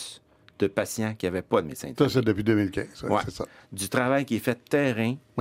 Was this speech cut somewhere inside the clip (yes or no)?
yes